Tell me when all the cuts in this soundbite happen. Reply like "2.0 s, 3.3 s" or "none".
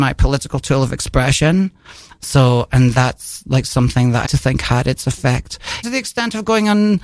2.1 s, 4.2 s, 5.8 s